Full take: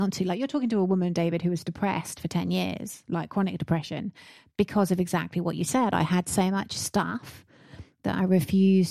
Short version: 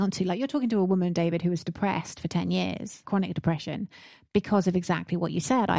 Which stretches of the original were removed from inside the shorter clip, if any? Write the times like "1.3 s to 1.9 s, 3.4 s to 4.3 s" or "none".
3.0 s to 3.3 s